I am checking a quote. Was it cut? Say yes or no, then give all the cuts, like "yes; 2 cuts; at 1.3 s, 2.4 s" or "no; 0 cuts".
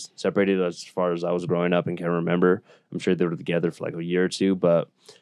no; 0 cuts